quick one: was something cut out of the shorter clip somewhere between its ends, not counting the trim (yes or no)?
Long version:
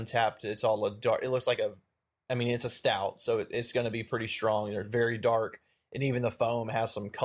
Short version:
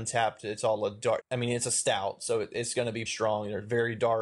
yes